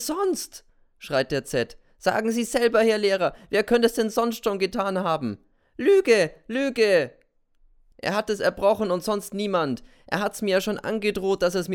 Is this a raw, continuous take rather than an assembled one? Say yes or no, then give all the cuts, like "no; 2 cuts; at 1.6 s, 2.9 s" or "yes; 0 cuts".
yes; 0 cuts